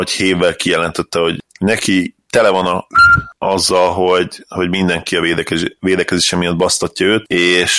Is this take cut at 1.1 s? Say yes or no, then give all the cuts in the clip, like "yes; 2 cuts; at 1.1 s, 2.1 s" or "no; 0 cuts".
no; 0 cuts